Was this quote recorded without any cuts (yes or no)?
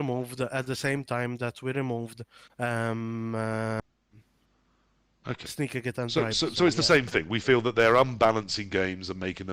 yes